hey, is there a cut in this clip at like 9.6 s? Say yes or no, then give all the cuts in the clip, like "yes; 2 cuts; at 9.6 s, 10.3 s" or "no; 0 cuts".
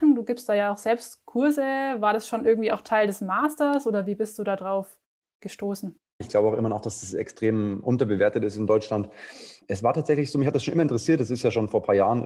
no; 1 cut; at 6.2 s